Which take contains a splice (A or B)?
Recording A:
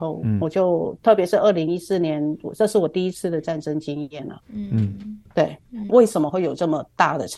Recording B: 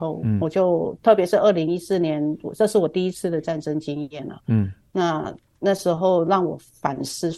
A